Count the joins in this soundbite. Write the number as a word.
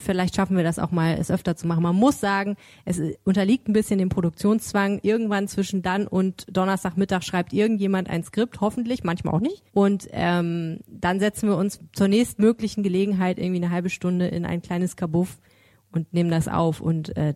two